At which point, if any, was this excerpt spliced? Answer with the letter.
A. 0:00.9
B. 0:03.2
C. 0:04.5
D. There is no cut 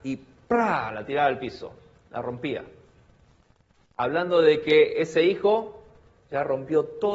D